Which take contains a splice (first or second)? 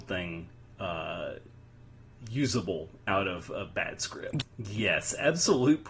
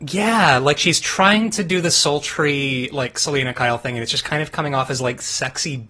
first